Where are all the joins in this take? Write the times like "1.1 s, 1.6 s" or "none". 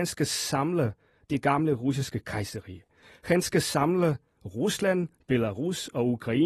none

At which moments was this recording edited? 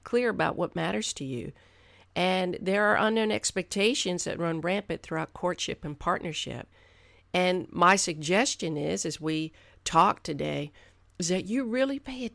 none

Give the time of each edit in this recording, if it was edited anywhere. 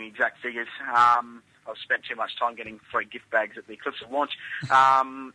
none

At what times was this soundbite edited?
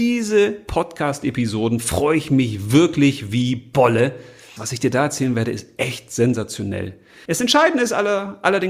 4.6 s, 7.2 s

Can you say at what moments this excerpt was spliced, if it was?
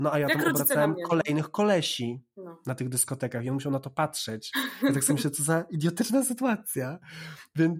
none

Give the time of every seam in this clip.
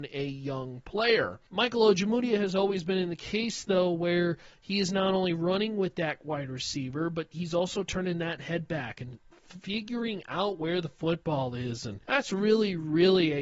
1.5 s, 12.0 s

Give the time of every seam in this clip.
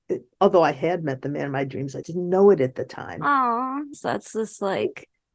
2.0 s, 3.9 s

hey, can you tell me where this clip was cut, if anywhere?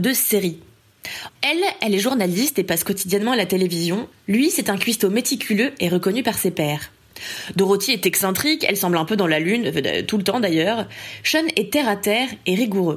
1.3 s

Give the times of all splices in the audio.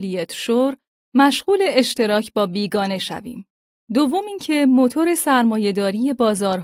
1.0 s

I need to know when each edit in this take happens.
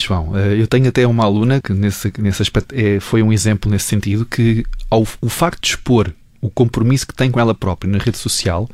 1.6 s

